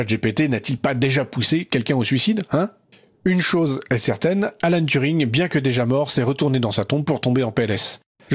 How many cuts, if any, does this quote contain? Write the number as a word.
zero